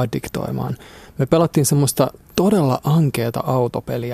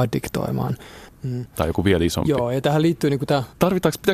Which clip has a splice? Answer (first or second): second